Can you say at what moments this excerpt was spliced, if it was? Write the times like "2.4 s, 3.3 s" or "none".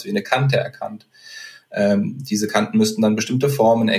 none